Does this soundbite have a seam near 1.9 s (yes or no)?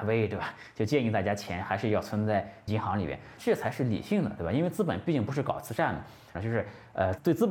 no